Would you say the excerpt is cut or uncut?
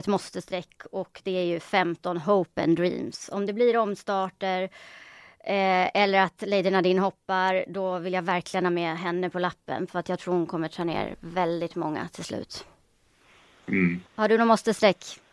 cut